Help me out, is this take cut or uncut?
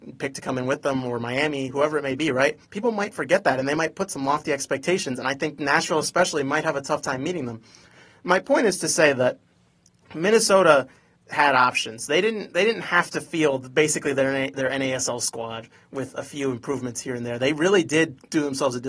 cut